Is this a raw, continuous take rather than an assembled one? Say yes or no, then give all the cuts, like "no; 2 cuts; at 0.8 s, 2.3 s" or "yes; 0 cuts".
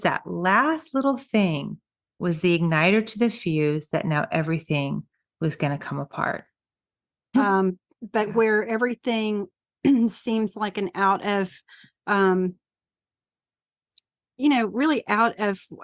no; 1 cut; at 7.3 s